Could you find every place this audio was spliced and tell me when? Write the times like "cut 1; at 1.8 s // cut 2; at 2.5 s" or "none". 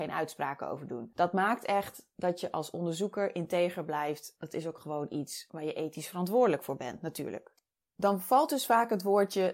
none